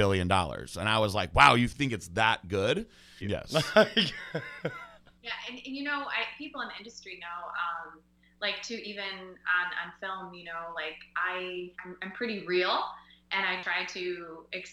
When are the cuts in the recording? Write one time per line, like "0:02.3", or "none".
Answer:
0:03.2
0:11.7